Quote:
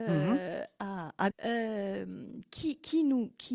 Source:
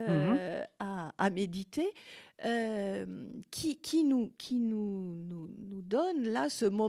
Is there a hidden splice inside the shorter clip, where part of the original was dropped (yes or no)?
yes